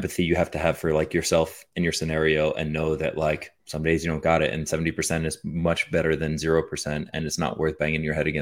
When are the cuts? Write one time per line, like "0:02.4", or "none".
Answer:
0:03.6